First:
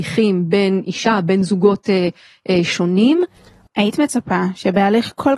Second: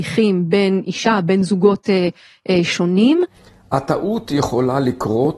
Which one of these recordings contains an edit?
first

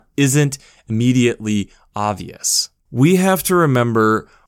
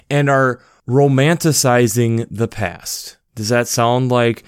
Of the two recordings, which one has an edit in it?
first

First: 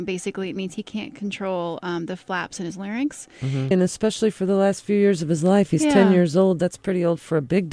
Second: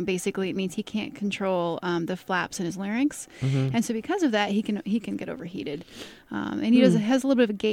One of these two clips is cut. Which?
first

